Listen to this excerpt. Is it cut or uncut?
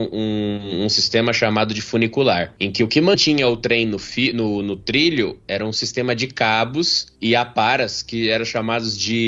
uncut